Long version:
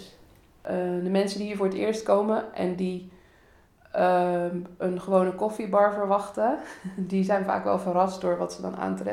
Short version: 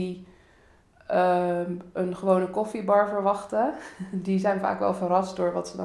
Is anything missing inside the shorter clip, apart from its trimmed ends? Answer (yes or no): no